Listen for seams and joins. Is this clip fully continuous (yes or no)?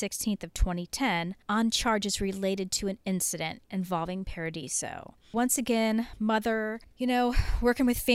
yes